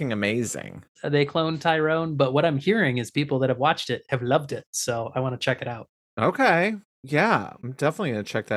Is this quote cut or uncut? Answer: cut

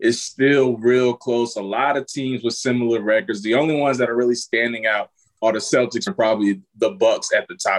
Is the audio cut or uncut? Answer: cut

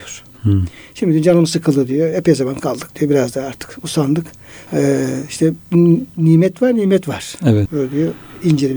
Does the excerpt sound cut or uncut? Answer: cut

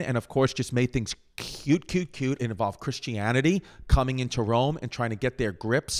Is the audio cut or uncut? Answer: cut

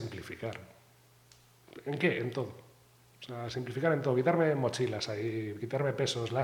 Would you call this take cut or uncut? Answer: uncut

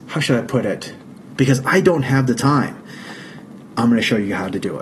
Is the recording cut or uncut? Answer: cut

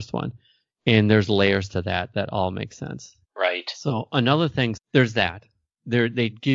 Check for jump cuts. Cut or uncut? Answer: cut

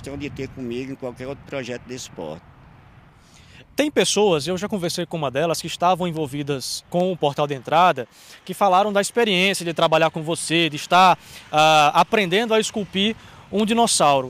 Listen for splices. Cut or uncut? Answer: cut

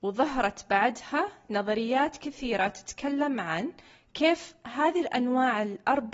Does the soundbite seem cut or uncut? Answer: uncut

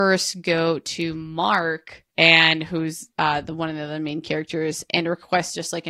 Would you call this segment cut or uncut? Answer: cut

